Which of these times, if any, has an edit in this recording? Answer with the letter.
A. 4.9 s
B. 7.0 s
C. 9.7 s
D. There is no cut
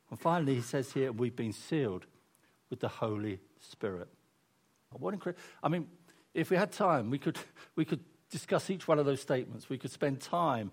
A